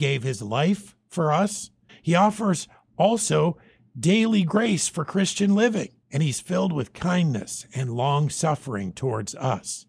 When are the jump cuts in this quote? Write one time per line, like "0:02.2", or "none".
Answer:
0:01.9
0:06.0